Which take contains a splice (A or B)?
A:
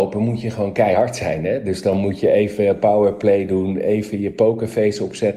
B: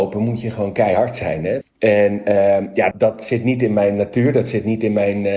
B